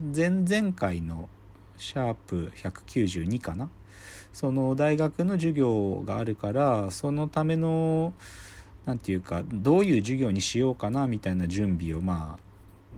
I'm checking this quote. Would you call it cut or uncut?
uncut